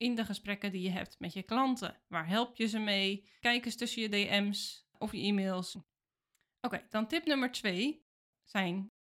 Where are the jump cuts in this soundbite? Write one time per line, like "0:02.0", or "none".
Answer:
0:03.4
0:05.7